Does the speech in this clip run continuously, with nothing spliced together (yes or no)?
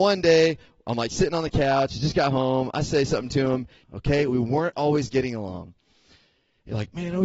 no